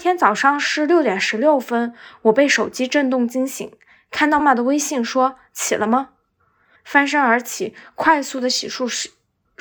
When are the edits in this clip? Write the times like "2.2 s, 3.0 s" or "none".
4.4 s, 6.7 s